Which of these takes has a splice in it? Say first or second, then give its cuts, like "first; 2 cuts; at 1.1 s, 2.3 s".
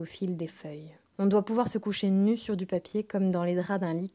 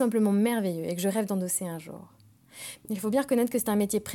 second; 1 cut; at 2.9 s